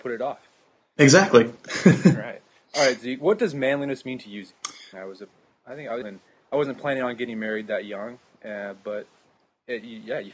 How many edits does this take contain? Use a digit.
2